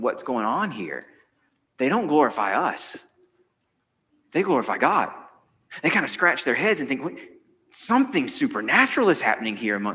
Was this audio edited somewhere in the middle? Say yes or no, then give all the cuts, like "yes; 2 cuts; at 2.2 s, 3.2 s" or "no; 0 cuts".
no; 0 cuts